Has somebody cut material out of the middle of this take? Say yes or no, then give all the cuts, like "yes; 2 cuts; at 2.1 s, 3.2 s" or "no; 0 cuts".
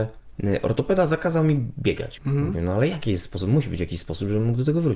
yes; 1 cut; at 2.2 s